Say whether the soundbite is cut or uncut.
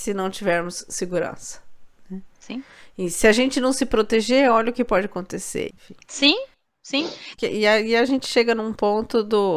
cut